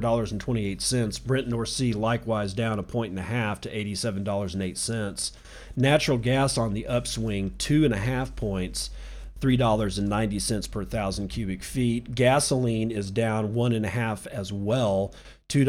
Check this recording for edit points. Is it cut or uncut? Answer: uncut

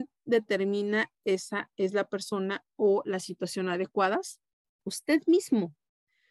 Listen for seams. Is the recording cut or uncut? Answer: cut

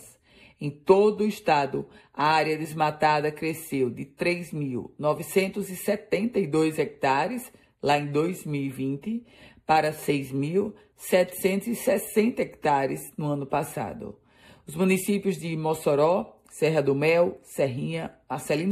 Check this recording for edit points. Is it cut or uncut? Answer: uncut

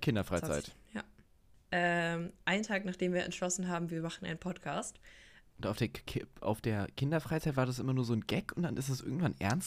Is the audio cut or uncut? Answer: cut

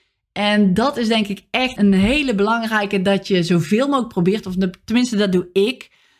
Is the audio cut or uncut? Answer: cut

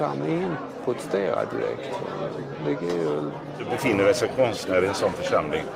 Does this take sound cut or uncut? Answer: uncut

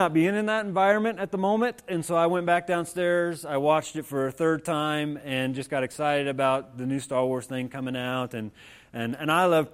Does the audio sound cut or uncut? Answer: uncut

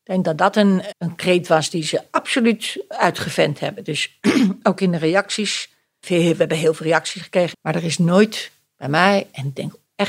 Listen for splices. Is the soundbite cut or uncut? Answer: cut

